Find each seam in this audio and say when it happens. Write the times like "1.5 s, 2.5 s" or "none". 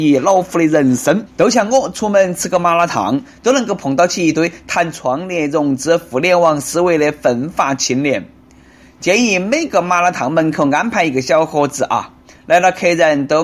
1.3 s